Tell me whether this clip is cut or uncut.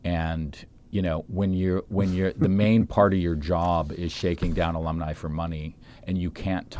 uncut